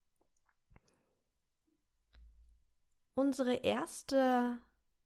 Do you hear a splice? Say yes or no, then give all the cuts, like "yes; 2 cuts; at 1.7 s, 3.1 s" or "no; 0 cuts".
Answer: no; 0 cuts